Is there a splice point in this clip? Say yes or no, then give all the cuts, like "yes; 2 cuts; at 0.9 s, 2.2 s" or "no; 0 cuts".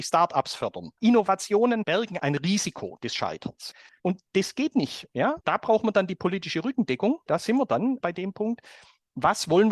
yes; 1 cut; at 3.9 s